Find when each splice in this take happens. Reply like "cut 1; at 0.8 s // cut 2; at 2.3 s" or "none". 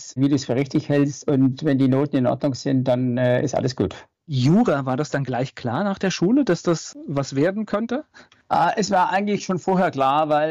none